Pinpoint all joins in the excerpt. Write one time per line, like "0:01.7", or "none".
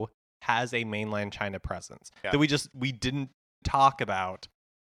0:02.2
0:03.6